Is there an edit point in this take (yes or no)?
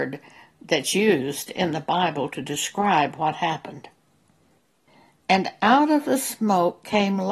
yes